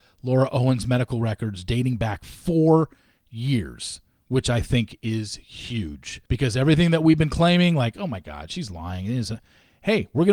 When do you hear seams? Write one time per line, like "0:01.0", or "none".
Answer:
0:06.3